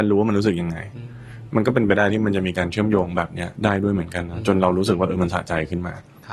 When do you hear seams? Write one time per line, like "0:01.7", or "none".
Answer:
0:03.5